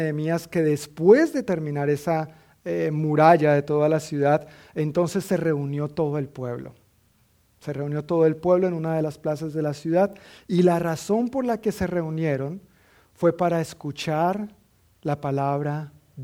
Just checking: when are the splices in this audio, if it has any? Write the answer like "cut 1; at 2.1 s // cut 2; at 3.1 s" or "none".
none

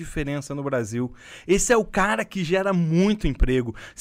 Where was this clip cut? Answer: none

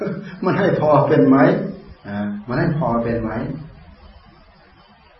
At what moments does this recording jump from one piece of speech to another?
cut 1; at 2.0 s

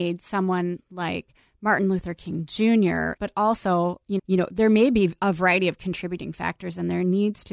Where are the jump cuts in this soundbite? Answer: cut 1; at 3.2 s // cut 2; at 4.2 s

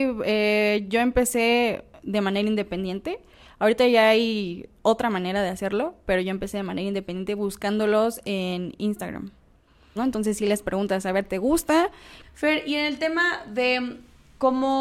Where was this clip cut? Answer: cut 1; at 10.0 s // cut 2; at 12.2 s

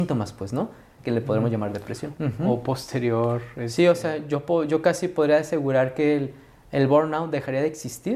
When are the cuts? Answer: cut 1; at 1.0 s // cut 2; at 2.2 s

